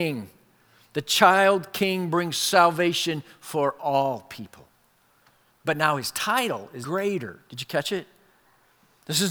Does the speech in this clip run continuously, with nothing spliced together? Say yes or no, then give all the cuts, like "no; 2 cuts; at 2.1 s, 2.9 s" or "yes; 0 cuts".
no; 1 cut; at 6.8 s